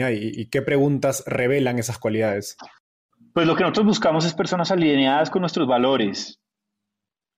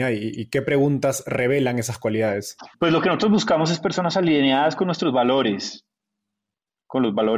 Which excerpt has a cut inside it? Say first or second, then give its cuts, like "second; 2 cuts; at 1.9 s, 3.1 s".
second; 1 cut; at 2.7 s